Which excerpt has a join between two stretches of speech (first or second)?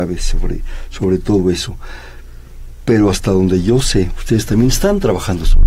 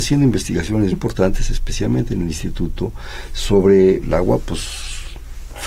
second